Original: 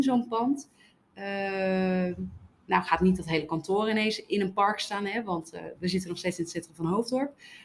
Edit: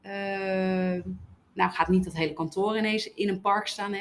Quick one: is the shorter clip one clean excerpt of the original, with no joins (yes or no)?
yes